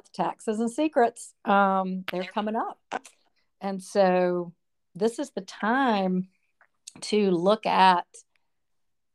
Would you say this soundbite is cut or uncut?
uncut